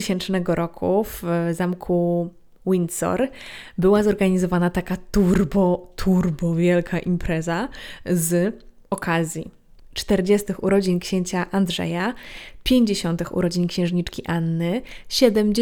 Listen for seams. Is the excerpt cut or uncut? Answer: uncut